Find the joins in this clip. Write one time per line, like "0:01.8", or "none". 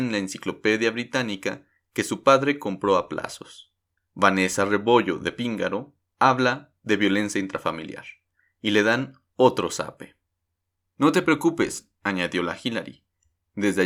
0:04.0
0:06.1
0:10.8